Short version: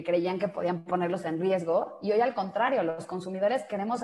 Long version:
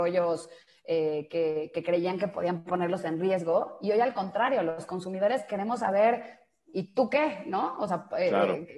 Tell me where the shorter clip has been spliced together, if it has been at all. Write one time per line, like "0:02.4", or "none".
none